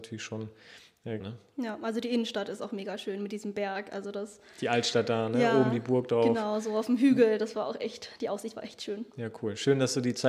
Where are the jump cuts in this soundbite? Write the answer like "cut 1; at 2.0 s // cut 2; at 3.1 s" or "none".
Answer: cut 1; at 1.2 s